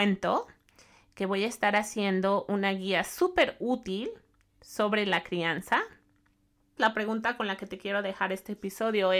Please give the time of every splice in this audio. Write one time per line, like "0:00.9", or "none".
0:06.8